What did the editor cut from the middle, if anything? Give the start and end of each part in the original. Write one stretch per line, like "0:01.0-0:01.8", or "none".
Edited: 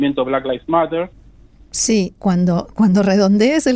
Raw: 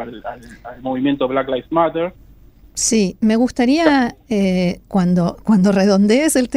0:03.2-0:04.8

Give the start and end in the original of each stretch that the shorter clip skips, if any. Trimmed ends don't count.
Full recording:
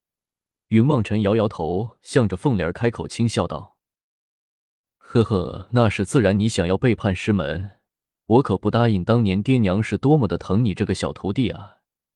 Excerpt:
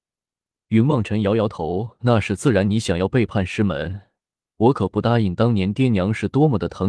0:02.0-0:05.7

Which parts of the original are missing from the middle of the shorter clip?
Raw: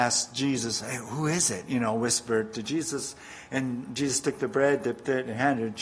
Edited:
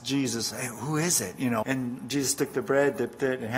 0:01.9-0:03.5

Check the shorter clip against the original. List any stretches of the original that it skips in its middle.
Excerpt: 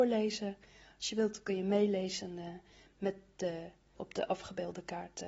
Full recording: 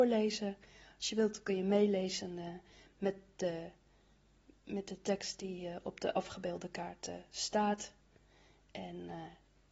0:03.9-0:05.8

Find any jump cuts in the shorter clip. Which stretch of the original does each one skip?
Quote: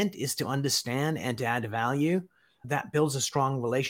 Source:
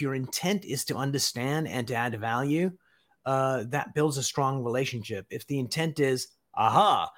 0:03.1-0:03.7

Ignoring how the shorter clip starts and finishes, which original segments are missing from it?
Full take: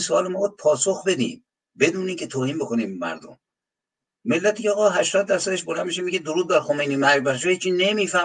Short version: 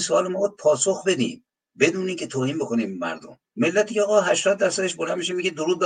0:03.5-0:04.1

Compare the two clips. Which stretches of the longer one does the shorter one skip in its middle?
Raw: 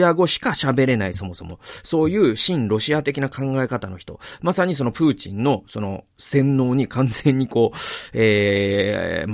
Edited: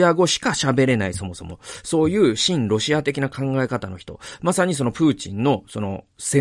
none

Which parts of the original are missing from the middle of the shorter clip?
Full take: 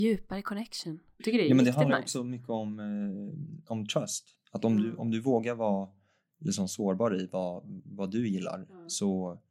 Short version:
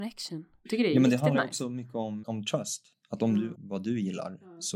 0:02.8-0:03.6
0:05.0-0:07.8

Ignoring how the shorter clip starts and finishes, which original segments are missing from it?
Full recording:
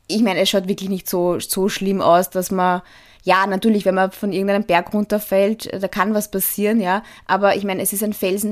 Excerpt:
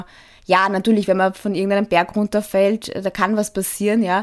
none

